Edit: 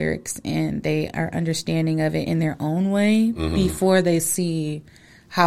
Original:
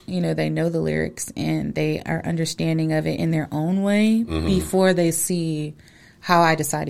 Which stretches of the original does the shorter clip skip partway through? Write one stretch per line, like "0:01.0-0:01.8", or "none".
none